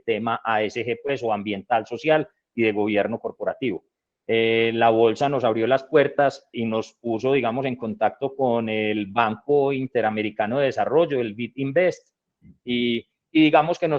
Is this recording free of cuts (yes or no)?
no